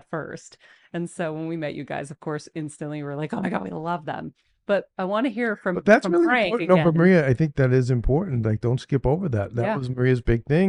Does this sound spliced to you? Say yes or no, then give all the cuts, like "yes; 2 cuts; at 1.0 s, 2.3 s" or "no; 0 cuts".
no; 0 cuts